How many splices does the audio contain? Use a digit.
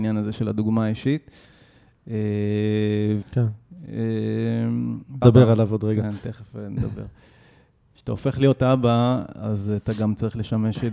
2